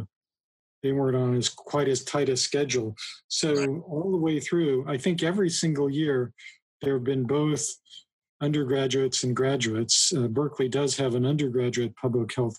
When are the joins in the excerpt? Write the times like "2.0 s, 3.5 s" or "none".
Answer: none